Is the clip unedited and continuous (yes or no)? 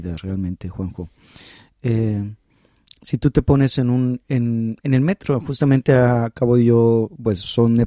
yes